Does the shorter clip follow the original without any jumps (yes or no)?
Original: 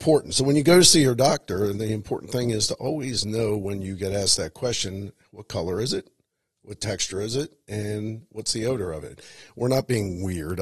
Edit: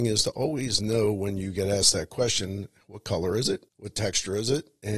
no